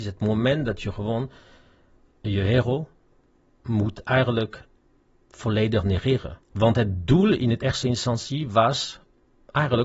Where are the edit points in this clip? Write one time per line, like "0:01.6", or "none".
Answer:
0:06.4